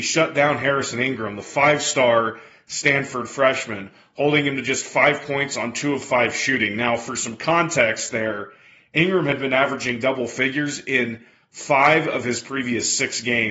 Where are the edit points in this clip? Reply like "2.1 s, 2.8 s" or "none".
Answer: none